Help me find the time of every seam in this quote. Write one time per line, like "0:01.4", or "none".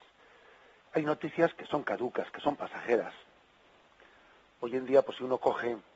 none